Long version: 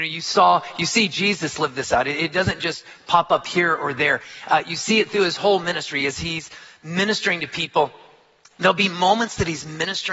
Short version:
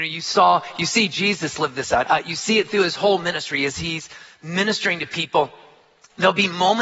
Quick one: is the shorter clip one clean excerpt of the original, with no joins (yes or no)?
no